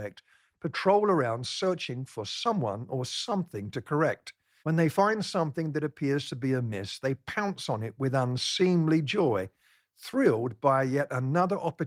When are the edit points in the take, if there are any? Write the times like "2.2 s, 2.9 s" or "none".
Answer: 4.6 s